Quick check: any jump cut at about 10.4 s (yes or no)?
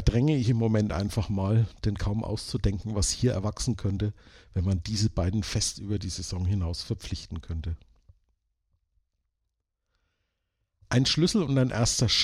no